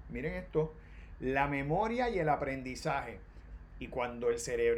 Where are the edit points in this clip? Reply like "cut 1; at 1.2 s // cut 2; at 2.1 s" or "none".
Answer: cut 1; at 3.7 s

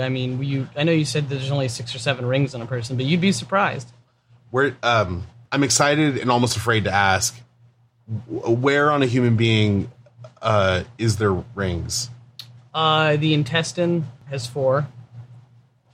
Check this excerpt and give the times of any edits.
none

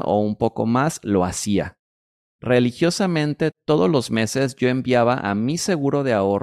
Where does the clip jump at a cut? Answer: cut 1; at 2.2 s

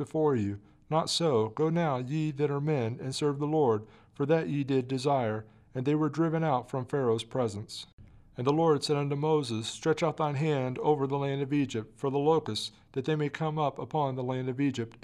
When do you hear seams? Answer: none

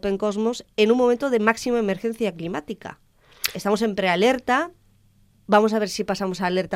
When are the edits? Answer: cut 1; at 3.5 s

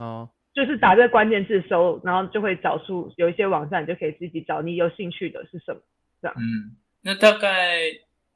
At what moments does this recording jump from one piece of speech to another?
none

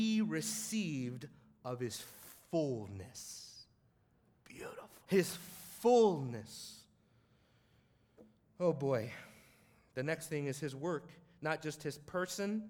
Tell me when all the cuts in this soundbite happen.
cut 1; at 5.0 s

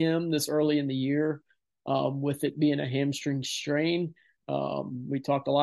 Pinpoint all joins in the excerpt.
cut 1; at 4.4 s

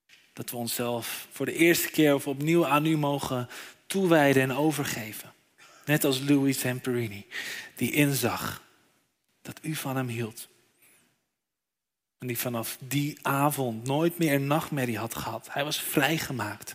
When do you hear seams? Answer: none

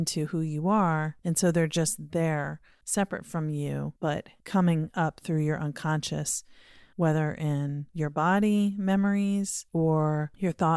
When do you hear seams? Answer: none

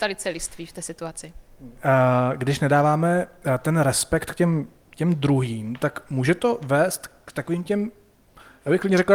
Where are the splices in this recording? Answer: none

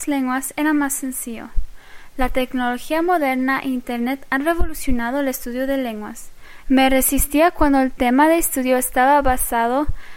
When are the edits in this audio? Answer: cut 1; at 6.6 s

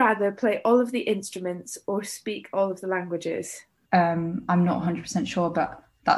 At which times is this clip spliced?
cut 1; at 3.9 s

